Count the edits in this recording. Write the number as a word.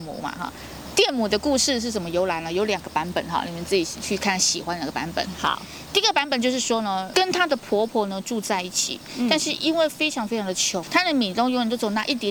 two